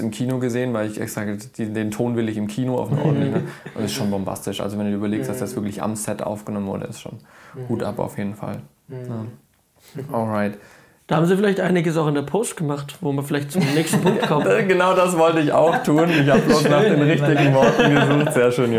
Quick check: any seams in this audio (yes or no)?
no